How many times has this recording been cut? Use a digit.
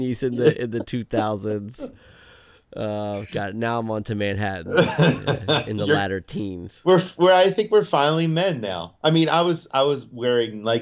0